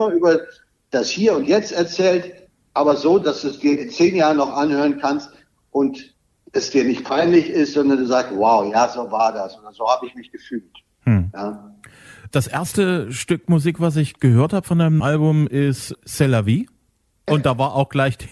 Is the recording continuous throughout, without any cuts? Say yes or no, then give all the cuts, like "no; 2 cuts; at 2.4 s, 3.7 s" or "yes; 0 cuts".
yes; 0 cuts